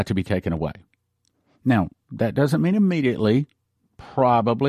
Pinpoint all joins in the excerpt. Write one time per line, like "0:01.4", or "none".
none